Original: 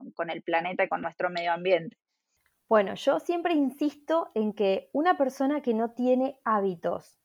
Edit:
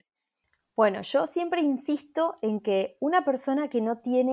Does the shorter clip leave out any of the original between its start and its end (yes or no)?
no